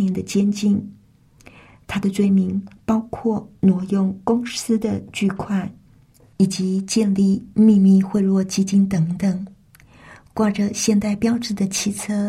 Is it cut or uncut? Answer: uncut